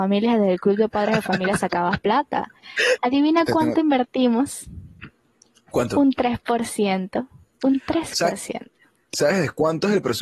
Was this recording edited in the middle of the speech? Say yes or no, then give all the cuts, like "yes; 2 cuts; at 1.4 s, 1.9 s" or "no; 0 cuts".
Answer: yes; 1 cut; at 3.0 s